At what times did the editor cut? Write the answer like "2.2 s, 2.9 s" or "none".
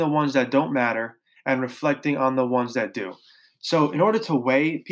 none